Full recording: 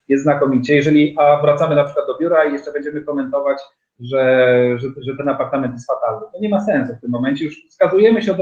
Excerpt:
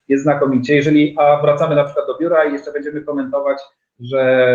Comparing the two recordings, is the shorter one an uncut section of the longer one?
yes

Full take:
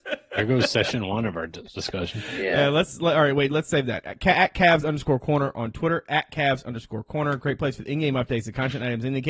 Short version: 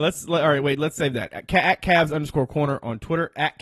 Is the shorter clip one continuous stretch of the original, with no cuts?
yes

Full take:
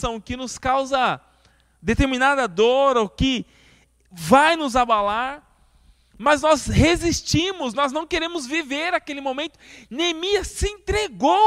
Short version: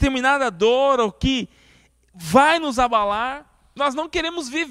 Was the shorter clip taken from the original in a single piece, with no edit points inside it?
no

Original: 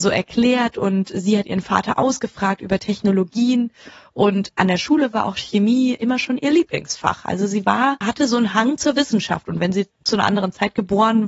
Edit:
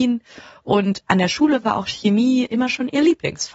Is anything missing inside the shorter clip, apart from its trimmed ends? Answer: no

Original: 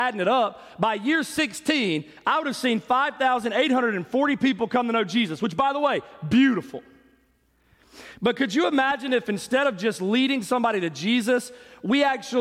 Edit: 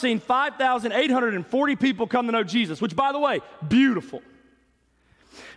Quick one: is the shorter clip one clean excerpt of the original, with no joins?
yes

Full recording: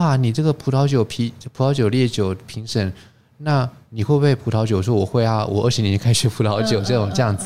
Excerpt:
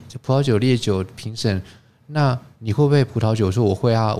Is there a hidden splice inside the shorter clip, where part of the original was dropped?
no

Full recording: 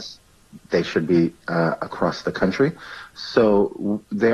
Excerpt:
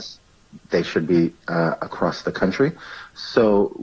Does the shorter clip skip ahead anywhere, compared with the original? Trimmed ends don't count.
no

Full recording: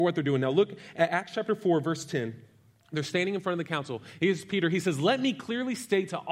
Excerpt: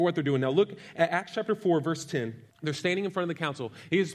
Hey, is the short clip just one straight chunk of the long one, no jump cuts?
no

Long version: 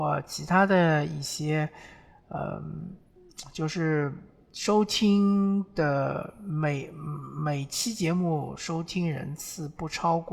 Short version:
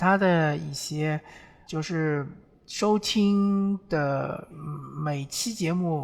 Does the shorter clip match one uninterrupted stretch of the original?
no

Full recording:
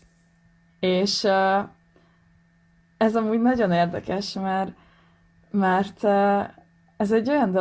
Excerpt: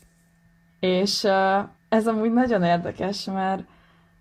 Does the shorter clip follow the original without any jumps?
no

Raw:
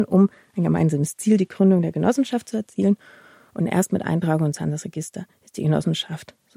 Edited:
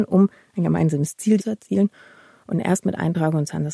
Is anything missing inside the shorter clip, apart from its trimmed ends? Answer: yes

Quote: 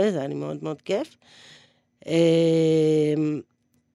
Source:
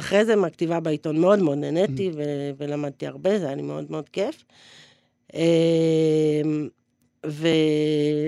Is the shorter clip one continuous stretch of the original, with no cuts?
yes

